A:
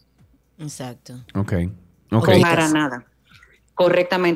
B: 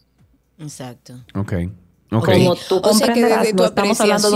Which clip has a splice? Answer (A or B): A